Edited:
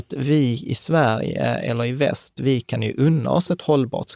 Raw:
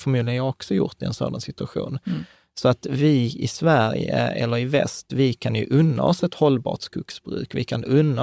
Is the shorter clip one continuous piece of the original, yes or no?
yes